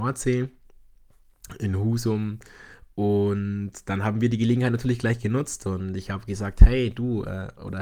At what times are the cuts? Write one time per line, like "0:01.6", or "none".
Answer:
none

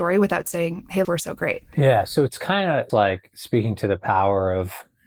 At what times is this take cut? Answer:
0:01.0
0:02.9

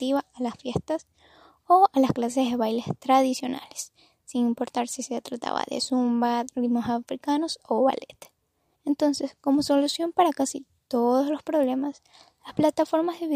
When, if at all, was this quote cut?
0:06.5
0:08.8

